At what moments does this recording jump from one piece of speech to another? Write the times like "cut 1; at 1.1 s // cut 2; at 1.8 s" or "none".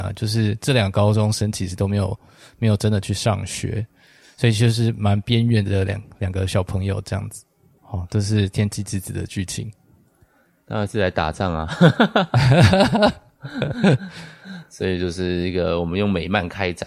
cut 1; at 7.8 s